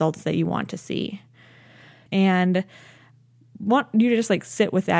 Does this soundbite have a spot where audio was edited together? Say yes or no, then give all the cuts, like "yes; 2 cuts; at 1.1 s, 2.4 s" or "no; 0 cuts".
yes; 1 cut; at 2.1 s